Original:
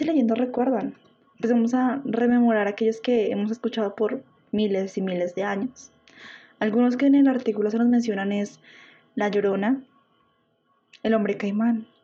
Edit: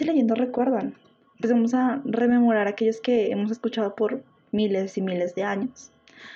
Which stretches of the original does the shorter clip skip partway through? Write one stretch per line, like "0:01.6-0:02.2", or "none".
none